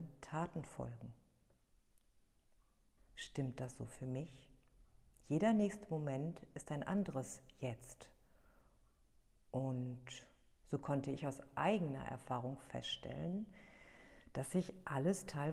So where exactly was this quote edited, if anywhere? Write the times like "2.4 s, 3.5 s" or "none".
3.0 s